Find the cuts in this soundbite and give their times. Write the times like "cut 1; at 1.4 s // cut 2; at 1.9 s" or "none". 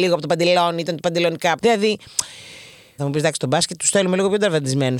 cut 1; at 1.6 s // cut 2; at 3.0 s